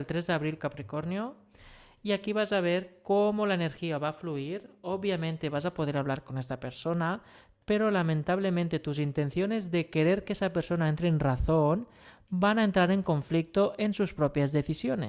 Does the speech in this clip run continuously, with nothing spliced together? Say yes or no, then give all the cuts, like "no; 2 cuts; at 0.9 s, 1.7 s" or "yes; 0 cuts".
yes; 0 cuts